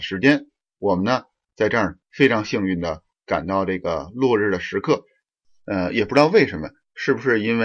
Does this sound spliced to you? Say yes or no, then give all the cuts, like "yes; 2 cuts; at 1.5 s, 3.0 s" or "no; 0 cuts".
yes; 1 cut; at 1.4 s